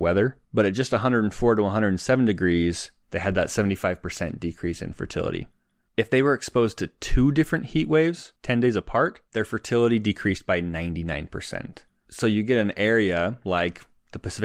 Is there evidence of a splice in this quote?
no; 0 cuts

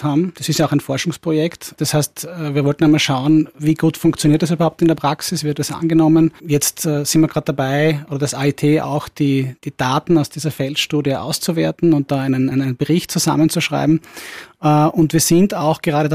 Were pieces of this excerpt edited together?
yes; 1 cut; at 12.5 s

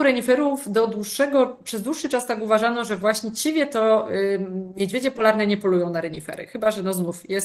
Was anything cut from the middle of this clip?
no; 0 cuts

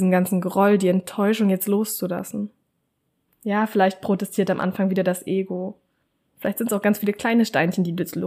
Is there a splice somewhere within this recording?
yes; 2 cuts; at 3.3 s, 6.3 s

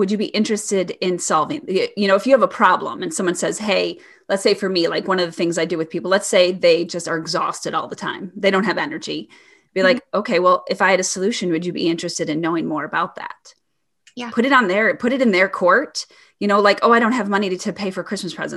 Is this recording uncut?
yes; 0 cuts

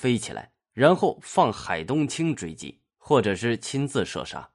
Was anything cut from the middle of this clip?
no; 0 cuts

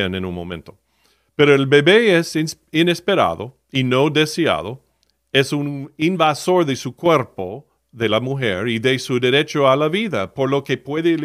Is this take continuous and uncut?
yes; 0 cuts

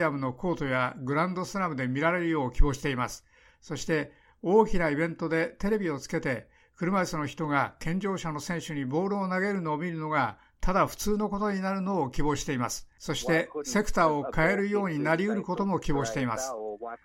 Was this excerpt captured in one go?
no; 1 cut; at 13.0 s

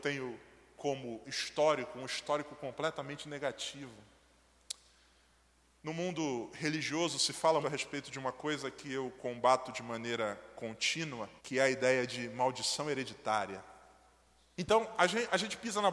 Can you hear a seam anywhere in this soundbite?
yes; 3 cuts; at 7.6 s, 11.4 s, 14.6 s

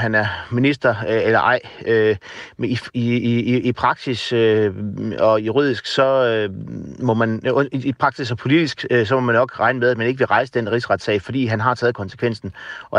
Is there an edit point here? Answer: no; 0 cuts

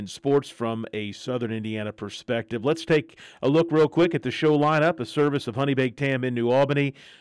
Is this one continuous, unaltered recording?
yes; 0 cuts

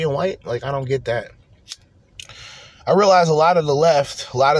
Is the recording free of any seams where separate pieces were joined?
yes; 0 cuts

